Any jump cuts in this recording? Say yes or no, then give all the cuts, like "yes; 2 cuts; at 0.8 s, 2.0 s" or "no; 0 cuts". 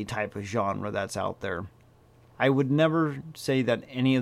yes; 1 cut; at 2.3 s